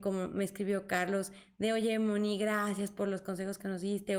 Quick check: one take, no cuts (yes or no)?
yes